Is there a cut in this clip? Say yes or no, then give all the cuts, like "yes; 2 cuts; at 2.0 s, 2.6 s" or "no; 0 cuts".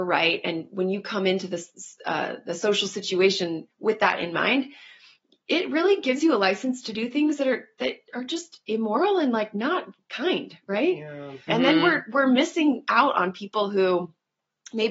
yes; 1 cut; at 11.5 s